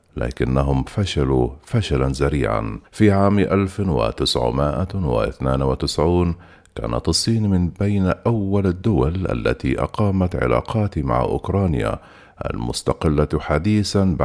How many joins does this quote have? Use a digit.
1